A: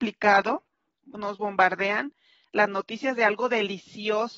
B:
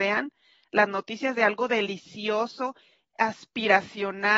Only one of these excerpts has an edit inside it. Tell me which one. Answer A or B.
A